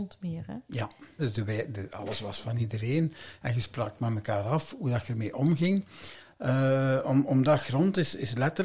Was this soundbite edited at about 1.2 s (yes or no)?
yes